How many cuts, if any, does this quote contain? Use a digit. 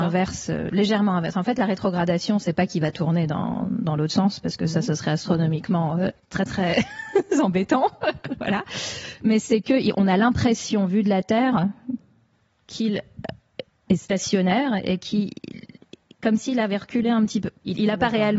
0